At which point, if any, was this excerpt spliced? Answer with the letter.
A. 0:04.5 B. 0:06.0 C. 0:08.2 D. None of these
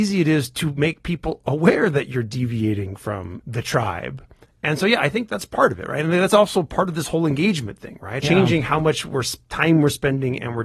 C